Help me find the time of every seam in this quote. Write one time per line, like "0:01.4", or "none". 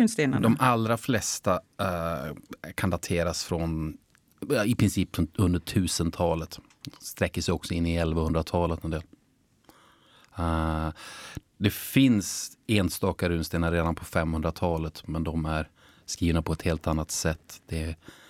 none